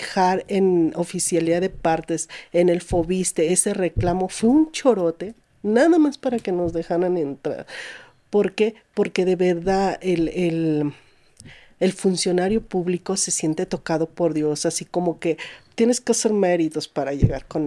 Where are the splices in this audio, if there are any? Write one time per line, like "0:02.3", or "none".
none